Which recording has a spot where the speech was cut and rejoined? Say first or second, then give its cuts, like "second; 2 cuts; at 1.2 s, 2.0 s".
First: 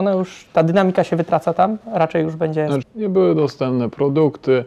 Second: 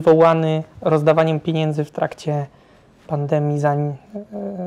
first; 1 cut; at 2.8 s